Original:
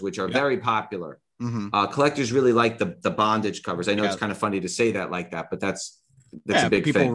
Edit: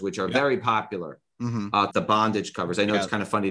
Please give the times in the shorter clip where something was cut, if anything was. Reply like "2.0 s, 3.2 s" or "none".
1.9 s